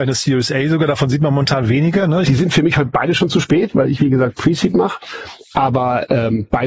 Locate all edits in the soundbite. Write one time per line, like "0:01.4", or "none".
0:02.2